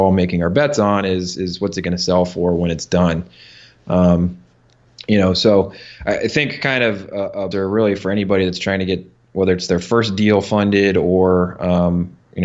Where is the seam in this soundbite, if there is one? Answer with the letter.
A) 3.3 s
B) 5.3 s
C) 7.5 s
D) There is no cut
C